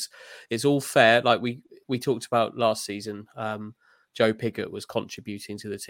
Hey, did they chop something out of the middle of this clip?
yes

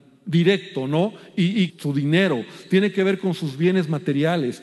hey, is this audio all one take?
no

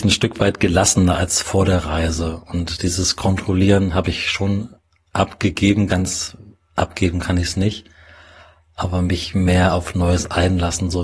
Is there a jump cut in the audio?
no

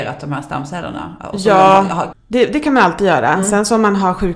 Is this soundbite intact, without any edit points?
no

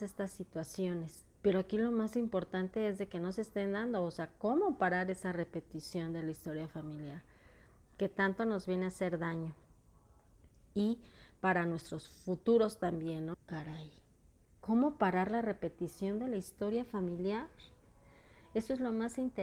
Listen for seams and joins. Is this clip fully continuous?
no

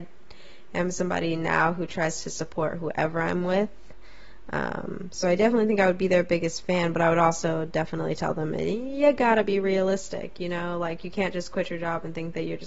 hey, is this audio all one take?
yes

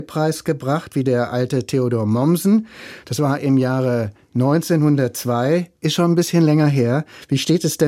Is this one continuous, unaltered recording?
yes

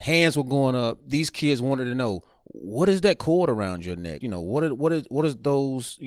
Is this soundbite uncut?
no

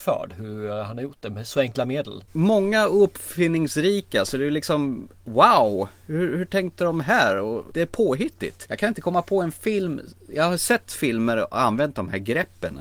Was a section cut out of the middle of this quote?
no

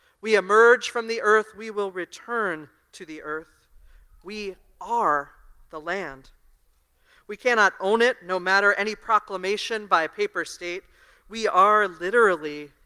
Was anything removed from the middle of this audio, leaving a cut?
no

